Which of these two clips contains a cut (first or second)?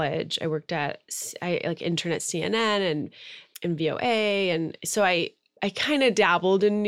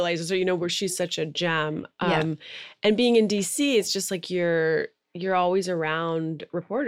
first